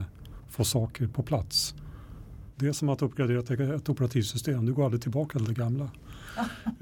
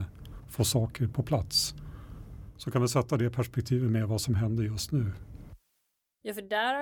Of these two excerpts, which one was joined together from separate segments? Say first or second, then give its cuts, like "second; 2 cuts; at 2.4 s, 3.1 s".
first; 1 cut; at 2.5 s